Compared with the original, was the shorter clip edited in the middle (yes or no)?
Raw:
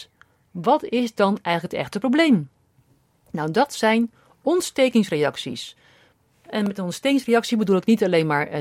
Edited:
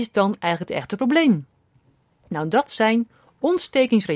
no